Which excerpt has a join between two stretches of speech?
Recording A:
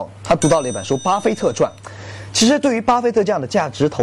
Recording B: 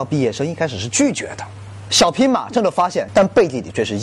B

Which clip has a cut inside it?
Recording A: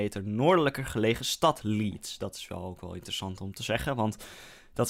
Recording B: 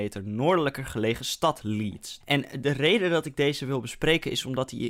B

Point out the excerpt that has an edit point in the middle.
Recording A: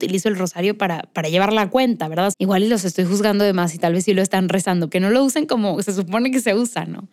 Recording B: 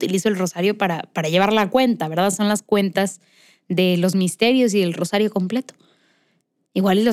A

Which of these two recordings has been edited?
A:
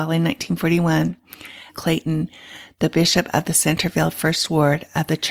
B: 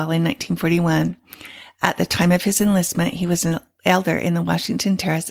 A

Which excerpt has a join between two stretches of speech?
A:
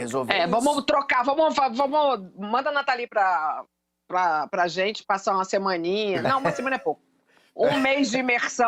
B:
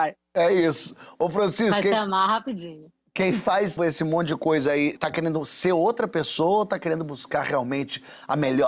B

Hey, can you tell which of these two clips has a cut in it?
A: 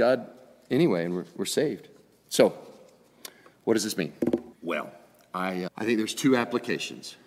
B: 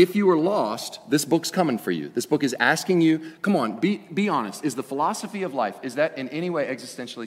A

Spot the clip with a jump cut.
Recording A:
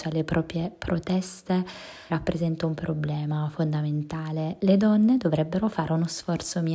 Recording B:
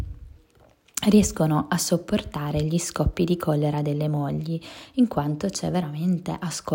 A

